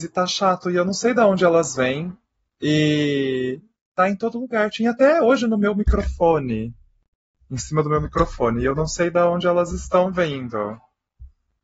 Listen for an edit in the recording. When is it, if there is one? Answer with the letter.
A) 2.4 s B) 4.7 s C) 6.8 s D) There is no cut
D